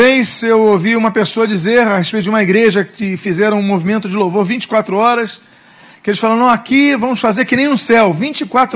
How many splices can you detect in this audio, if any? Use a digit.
0